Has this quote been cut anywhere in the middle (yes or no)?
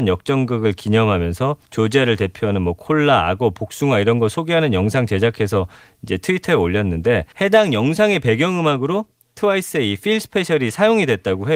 yes